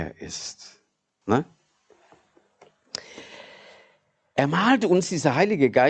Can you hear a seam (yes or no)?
yes